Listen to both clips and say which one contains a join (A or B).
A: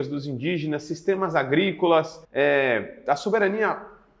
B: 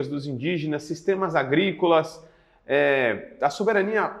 A